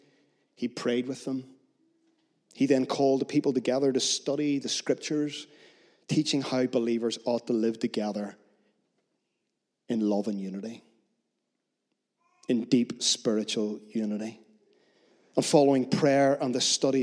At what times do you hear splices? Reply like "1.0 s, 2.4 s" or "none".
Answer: none